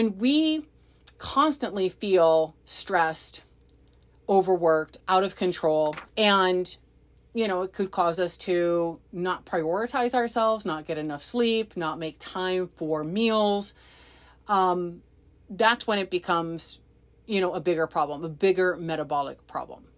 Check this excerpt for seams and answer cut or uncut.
cut